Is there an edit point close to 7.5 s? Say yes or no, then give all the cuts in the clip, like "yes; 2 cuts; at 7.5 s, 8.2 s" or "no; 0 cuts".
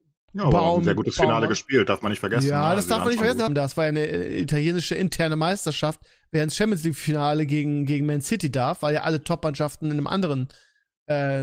no; 1 cut; at 3.5 s